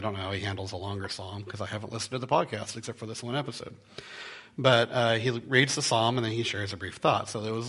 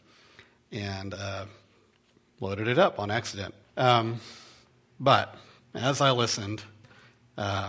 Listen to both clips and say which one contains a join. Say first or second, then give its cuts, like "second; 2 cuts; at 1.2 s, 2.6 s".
second; 1 cut; at 3.6 s